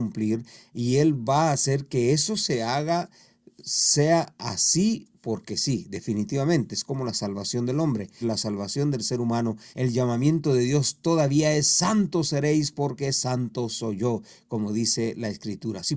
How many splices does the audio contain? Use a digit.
2